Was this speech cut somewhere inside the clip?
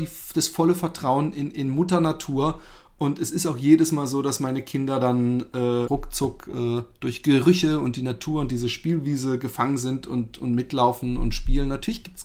yes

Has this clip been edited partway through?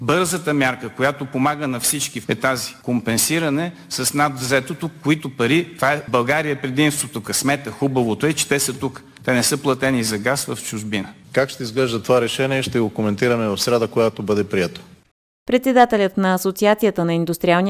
yes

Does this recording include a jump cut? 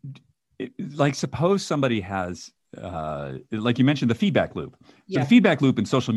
no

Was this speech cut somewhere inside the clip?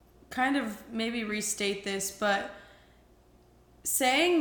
no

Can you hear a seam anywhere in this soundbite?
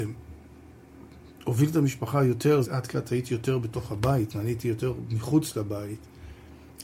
yes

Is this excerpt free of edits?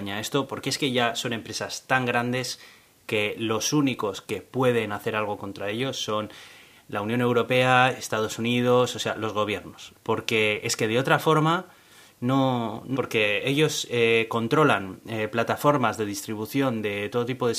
no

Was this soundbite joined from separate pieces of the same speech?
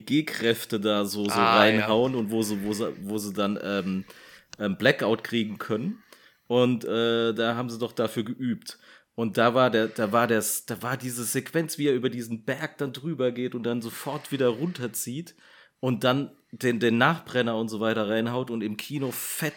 no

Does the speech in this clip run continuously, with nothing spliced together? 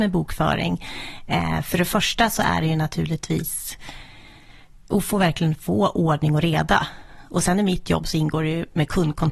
yes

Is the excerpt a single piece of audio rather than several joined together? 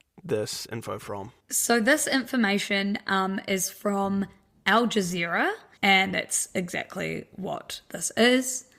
no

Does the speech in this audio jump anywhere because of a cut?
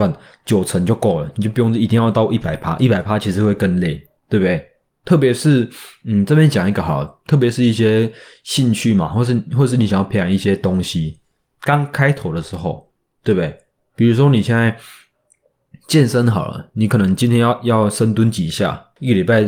yes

